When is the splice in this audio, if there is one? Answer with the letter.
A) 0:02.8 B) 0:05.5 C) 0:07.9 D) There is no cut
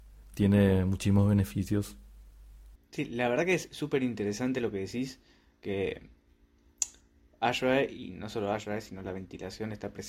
A